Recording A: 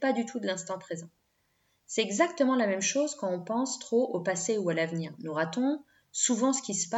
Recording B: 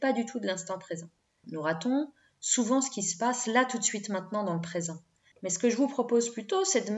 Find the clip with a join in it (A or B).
B